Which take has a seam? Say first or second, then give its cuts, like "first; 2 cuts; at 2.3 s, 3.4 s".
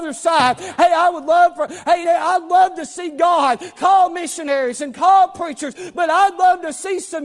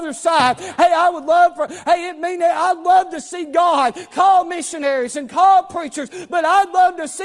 first; 1 cut; at 2.0 s